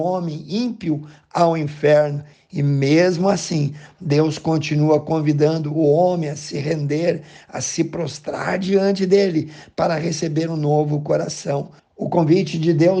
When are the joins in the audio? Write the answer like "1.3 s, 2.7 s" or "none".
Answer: 2.3 s, 11.8 s